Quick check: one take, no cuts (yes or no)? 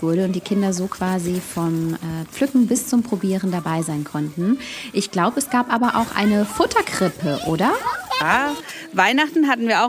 yes